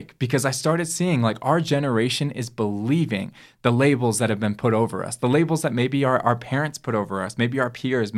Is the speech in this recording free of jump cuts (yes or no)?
yes